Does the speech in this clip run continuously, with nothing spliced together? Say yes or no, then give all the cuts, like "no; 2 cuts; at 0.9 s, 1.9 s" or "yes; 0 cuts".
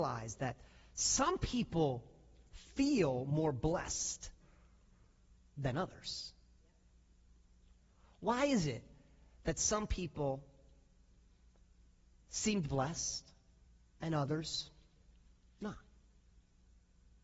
yes; 0 cuts